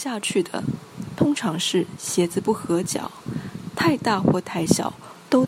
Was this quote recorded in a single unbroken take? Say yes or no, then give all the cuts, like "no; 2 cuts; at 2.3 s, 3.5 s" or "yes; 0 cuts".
yes; 0 cuts